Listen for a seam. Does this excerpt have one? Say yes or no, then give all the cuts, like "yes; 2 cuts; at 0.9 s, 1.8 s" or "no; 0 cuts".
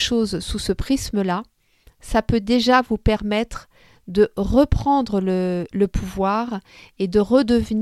no; 0 cuts